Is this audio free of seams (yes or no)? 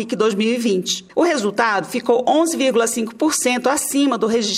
no